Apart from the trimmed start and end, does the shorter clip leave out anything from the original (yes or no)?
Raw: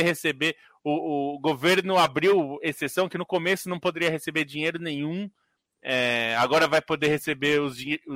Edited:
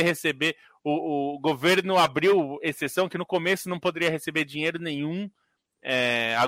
no